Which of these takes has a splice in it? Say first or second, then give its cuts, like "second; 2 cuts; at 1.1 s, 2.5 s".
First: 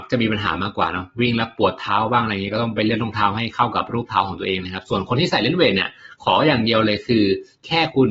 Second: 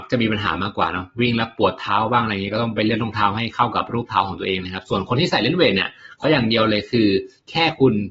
second; 1 cut; at 6.2 s